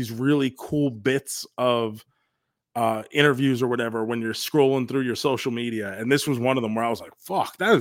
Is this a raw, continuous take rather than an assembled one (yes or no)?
yes